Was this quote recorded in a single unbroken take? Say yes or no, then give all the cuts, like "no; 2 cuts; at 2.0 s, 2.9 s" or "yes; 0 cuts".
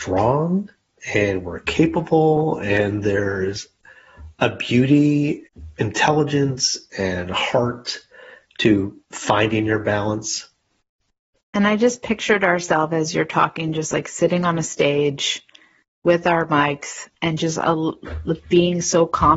no; 1 cut; at 11.4 s